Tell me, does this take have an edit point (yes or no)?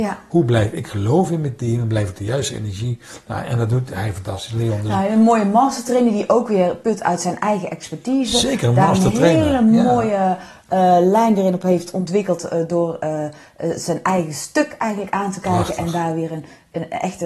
no